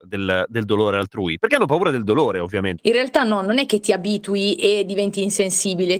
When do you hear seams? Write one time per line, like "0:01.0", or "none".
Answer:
0:02.8

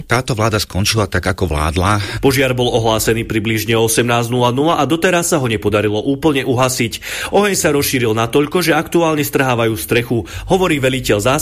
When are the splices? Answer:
0:02.1

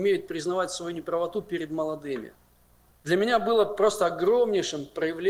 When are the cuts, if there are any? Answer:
0:02.9

